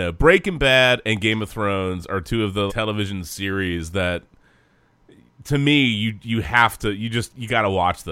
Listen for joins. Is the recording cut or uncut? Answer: cut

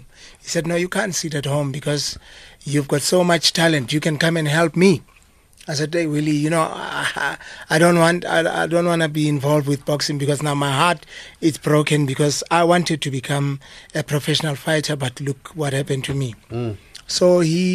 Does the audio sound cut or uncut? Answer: uncut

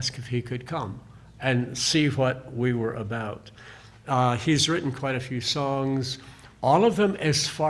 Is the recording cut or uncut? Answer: uncut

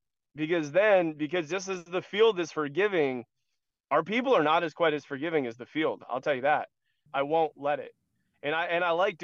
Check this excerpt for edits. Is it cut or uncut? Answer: cut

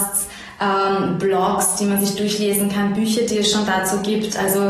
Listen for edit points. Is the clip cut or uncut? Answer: uncut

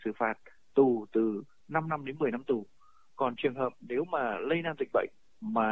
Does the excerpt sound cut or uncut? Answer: uncut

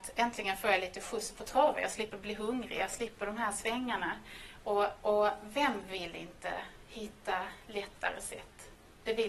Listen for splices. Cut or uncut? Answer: uncut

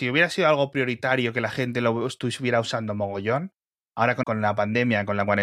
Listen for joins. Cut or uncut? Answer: cut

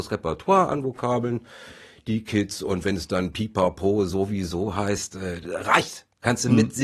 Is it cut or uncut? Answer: uncut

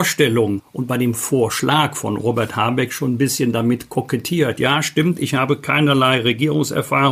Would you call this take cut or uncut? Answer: uncut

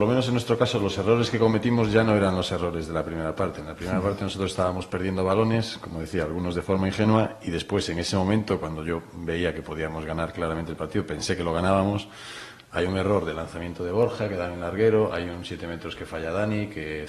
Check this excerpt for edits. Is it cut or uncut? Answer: uncut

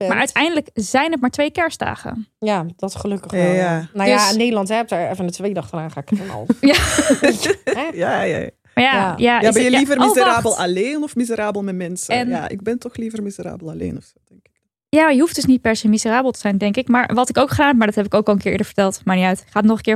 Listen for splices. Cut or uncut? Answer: uncut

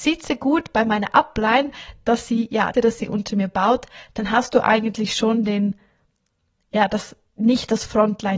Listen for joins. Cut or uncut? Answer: cut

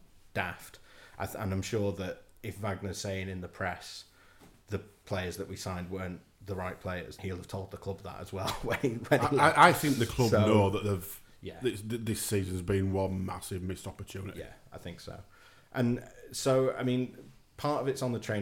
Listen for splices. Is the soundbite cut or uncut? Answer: cut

